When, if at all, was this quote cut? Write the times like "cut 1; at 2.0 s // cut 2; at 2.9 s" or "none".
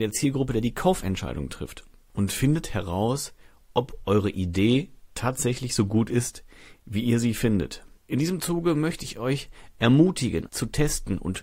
cut 1; at 8.0 s // cut 2; at 10.5 s